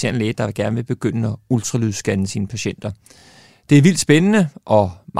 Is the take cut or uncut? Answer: uncut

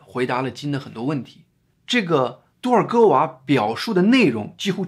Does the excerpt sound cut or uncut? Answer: cut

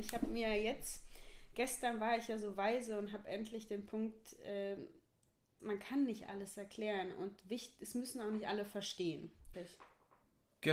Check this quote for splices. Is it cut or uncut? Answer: cut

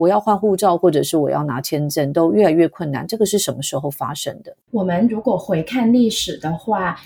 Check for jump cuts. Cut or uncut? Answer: cut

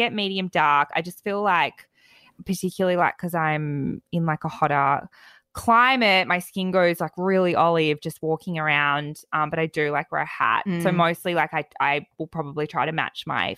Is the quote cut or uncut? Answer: uncut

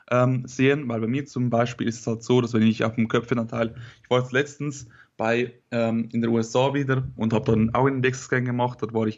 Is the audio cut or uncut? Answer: cut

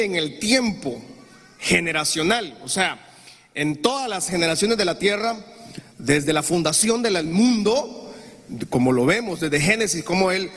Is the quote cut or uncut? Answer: uncut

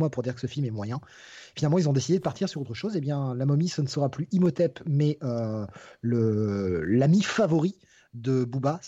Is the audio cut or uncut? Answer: uncut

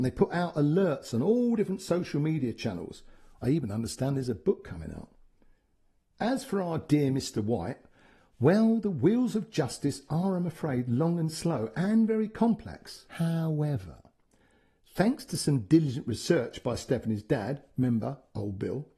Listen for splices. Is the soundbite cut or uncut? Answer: cut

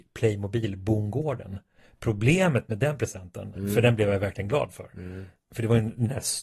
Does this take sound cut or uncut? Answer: uncut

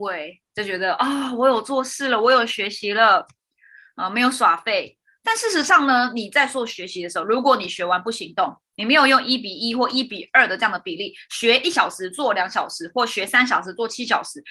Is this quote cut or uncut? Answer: uncut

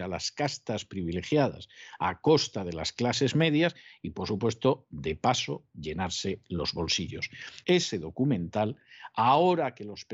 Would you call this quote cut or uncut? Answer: cut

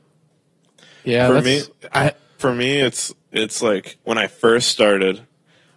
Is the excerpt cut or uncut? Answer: cut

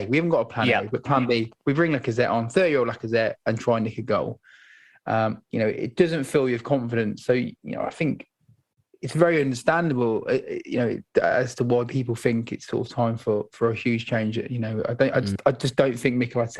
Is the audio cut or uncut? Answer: uncut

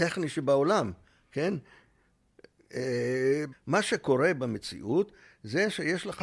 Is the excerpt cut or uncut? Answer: cut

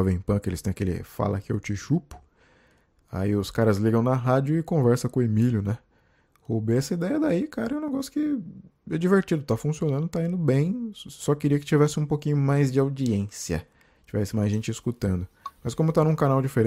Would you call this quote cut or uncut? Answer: uncut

